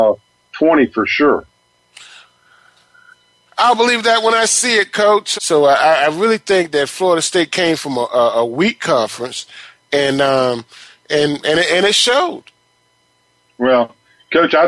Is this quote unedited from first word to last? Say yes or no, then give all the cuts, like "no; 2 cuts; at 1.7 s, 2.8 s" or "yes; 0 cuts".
no; 1 cut; at 5.3 s